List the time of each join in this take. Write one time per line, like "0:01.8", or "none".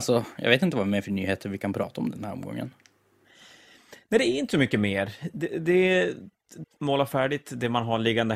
0:06.6